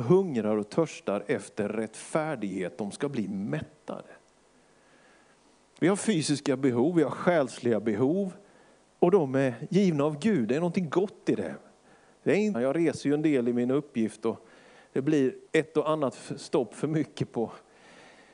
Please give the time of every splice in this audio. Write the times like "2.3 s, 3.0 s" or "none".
12.5 s, 15.5 s